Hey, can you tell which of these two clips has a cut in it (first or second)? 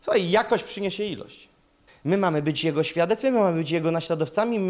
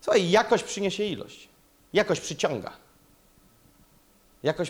first